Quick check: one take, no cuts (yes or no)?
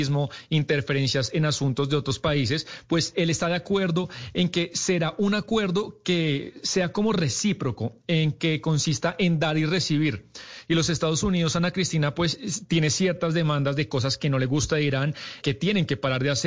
no